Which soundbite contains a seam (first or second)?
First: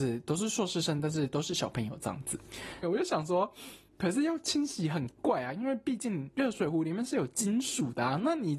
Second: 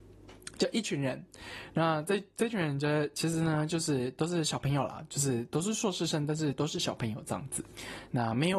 first